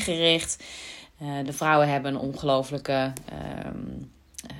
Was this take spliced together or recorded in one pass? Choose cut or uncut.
uncut